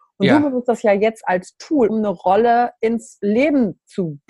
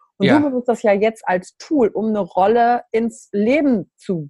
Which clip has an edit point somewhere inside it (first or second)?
first